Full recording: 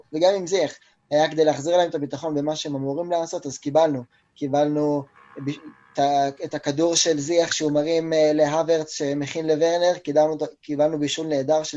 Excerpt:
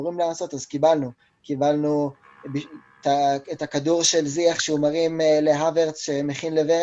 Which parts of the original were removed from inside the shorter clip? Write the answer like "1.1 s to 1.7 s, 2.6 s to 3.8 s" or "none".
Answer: none